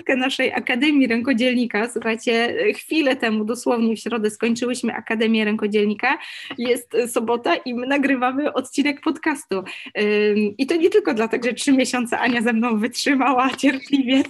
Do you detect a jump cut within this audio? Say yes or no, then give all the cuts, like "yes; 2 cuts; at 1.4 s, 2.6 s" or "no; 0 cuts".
yes; 1 cut; at 11.4 s